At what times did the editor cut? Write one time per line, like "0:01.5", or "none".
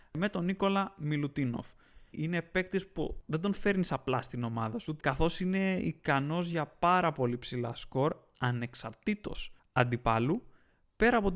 0:02.1
0:05.0